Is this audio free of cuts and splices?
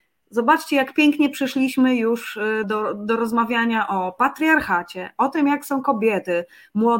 no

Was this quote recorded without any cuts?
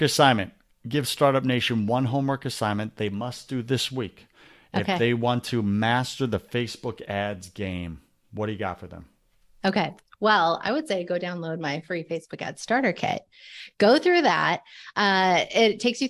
yes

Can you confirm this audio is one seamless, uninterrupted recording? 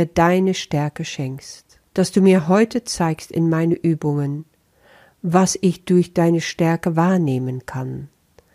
no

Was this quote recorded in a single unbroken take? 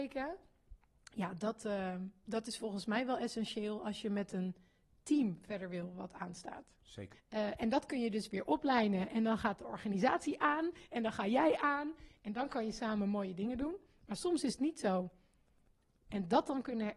no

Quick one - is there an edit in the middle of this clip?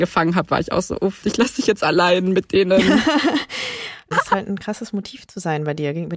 yes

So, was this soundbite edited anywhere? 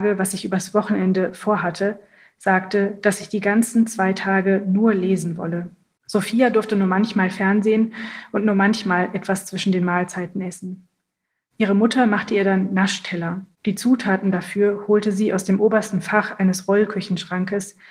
yes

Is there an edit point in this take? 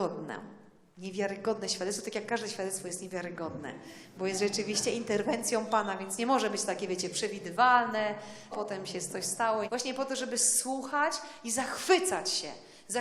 yes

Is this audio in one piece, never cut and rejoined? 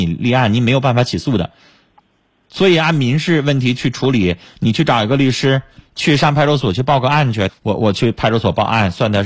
no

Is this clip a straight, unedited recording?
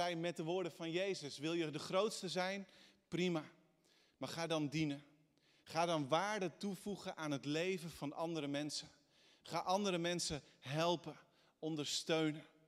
yes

